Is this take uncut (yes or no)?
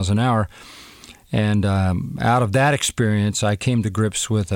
yes